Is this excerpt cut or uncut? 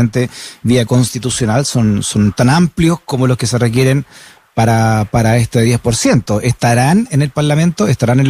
uncut